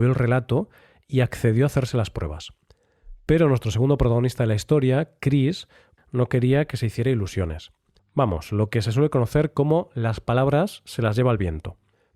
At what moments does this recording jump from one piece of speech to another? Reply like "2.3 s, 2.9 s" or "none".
6.0 s, 8.0 s